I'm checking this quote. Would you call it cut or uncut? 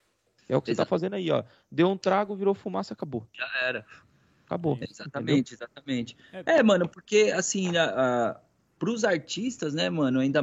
uncut